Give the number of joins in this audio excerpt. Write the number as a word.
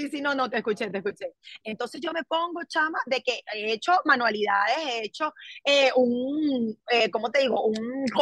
one